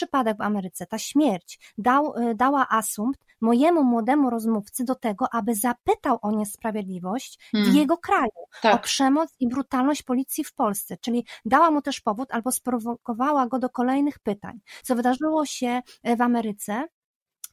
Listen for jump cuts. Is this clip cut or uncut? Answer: cut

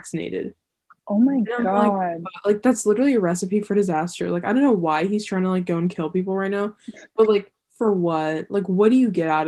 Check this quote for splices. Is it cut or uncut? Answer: uncut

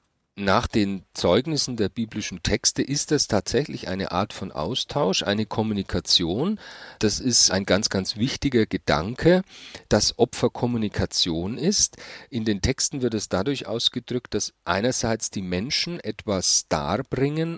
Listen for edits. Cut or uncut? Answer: uncut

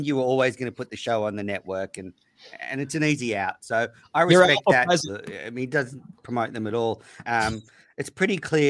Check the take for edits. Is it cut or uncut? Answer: cut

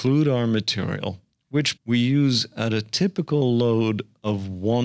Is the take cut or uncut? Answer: cut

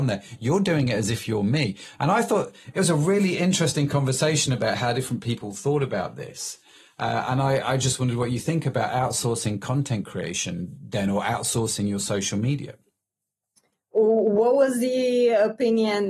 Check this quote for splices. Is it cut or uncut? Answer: uncut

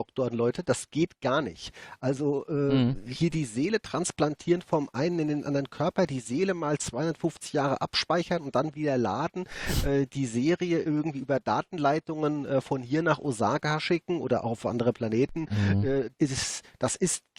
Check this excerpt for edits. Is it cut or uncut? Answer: cut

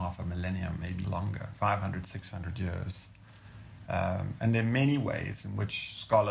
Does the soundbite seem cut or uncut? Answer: cut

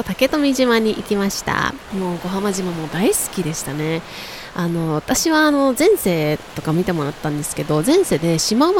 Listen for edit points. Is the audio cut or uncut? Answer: cut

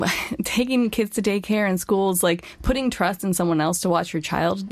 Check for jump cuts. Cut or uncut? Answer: uncut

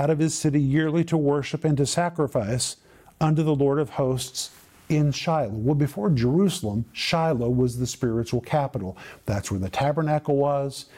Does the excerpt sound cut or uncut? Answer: uncut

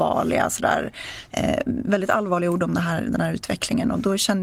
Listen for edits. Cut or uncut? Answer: uncut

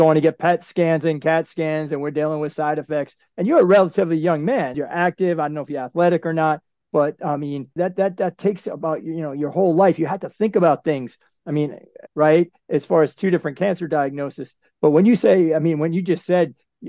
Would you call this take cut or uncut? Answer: cut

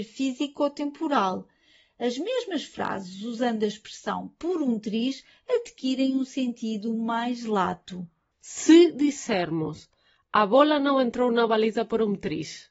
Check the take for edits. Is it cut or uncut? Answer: uncut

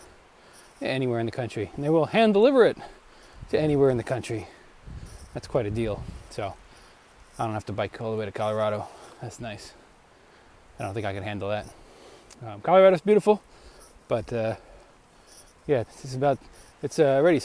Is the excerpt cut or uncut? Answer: cut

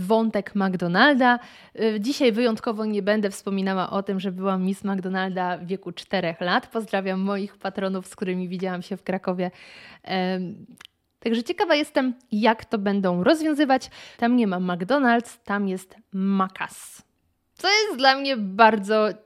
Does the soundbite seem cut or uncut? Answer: cut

